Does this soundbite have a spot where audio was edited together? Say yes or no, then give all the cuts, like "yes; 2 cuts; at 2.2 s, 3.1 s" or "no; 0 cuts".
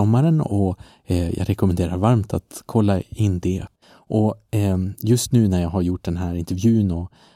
yes; 1 cut; at 3.8 s